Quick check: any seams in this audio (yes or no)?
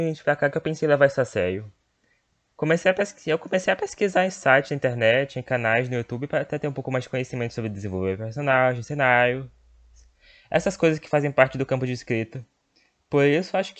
no